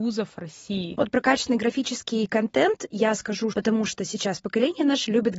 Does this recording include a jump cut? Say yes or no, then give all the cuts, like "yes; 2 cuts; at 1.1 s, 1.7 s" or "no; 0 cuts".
yes; 2 cuts; at 1.0 s, 3.5 s